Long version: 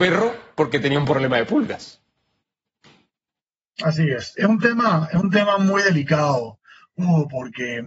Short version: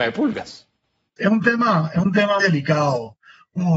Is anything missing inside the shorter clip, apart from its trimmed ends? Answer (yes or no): yes